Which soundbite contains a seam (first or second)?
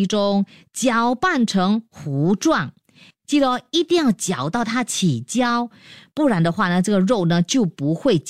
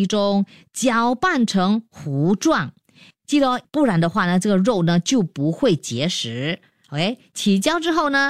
second